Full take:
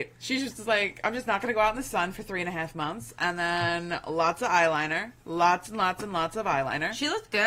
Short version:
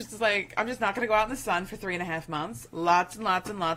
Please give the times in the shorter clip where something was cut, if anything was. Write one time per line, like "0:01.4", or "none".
0:02.7